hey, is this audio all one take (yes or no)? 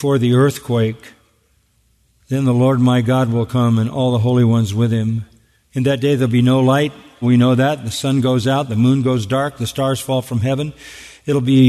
no